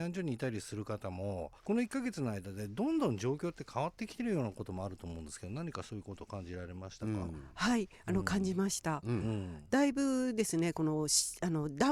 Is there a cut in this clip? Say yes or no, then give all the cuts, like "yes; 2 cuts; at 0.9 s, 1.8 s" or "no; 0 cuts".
yes; 1 cut; at 1.6 s